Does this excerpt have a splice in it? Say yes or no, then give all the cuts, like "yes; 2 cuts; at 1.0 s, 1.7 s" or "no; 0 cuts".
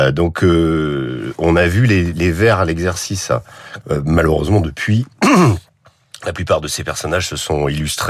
yes; 1 cut; at 3.8 s